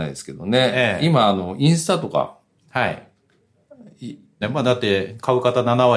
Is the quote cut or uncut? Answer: cut